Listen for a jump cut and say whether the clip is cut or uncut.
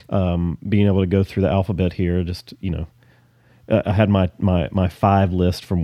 uncut